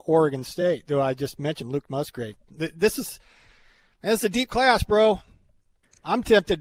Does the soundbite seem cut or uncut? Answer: uncut